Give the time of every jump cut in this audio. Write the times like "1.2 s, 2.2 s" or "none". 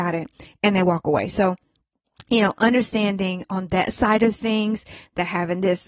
none